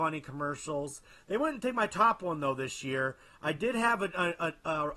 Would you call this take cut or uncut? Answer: uncut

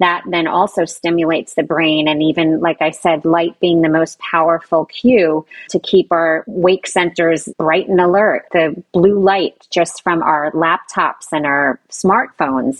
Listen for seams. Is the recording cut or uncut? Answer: uncut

